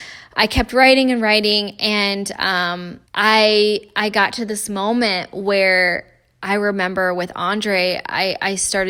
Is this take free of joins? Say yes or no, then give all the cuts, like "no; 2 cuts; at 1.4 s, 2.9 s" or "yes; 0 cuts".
no; 1 cut; at 3.0 s